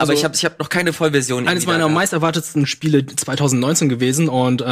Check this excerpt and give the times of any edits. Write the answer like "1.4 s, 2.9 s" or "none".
none